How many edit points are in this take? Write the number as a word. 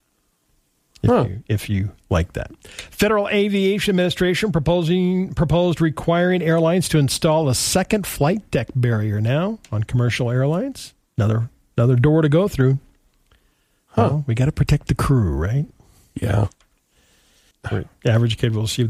one